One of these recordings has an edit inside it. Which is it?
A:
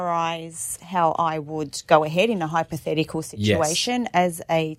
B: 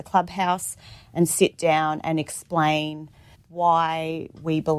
B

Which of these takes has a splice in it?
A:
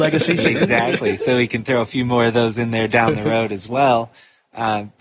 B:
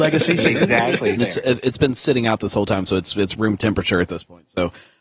B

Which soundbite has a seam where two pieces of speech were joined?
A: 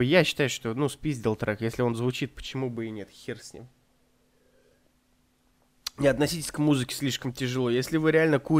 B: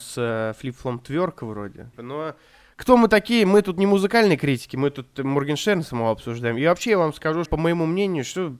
B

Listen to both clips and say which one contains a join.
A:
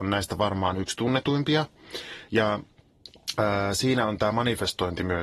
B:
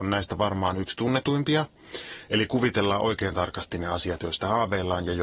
B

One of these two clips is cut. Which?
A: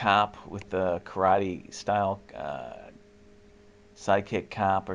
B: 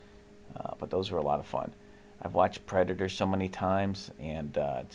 B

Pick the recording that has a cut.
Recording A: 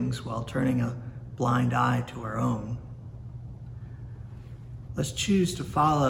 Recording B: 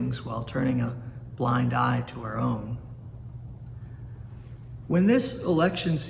A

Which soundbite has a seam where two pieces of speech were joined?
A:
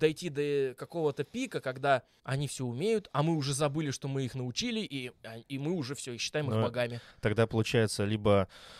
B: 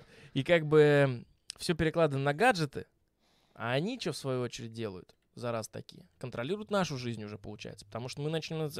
A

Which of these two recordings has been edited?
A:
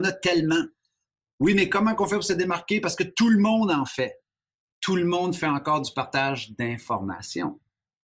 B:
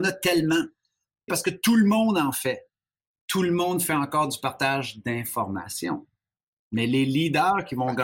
B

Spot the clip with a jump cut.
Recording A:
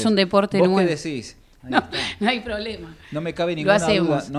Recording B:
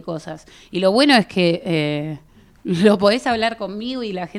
A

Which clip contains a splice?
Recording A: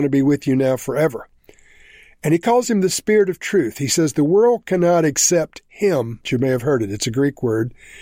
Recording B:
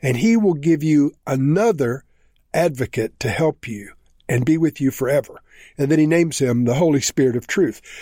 A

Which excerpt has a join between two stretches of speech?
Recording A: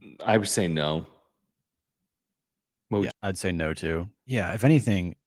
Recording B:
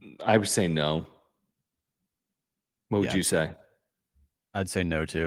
A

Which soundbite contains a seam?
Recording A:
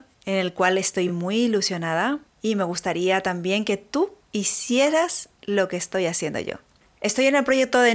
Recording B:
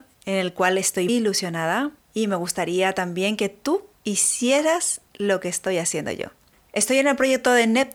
B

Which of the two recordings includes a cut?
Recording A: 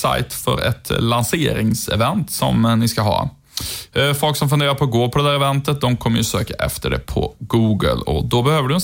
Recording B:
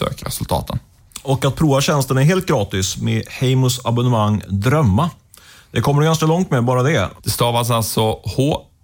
B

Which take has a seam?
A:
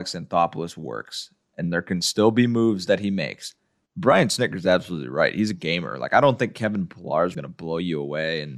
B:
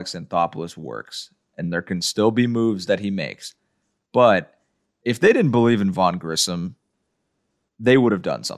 A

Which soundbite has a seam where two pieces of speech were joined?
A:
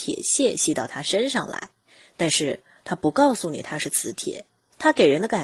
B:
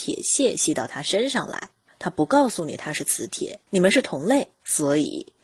B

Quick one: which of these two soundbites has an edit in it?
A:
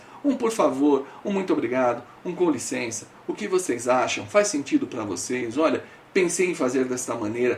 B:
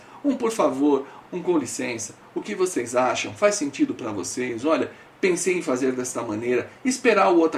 B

